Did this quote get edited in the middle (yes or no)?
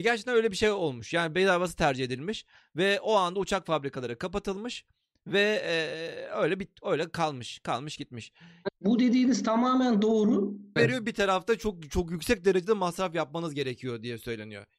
yes